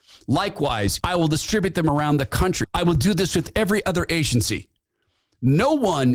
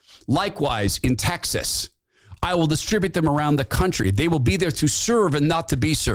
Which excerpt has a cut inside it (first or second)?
first